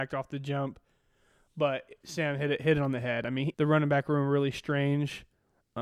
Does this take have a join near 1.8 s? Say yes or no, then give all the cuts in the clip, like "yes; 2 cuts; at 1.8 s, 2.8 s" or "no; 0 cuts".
no; 1 cut; at 3.5 s